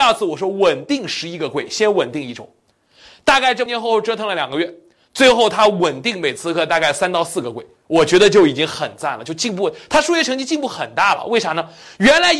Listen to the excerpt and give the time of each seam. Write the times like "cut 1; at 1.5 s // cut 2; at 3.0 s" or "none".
cut 1; at 3.7 s